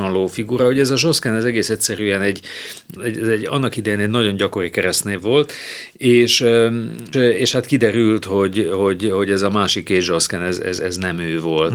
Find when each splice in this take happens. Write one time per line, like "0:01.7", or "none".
0:03.0
0:07.1